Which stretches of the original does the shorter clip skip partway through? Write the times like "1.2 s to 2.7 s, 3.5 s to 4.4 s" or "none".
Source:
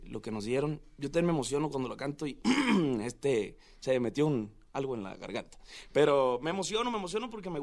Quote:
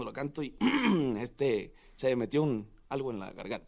none